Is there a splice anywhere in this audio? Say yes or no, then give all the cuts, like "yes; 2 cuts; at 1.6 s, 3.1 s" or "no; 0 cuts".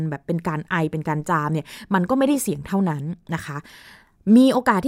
no; 0 cuts